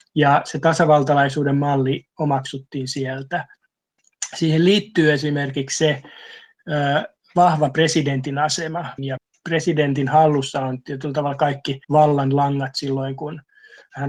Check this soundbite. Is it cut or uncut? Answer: cut